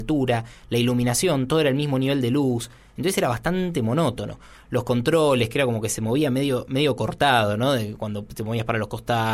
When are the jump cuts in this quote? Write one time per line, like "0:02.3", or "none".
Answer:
none